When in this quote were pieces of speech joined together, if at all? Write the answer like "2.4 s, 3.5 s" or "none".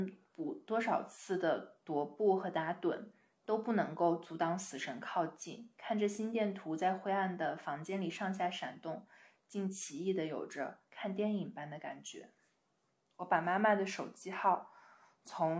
none